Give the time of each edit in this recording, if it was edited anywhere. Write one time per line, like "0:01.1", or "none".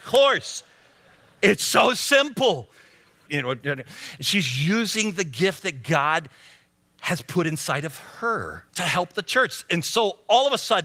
0:03.3
0:08.7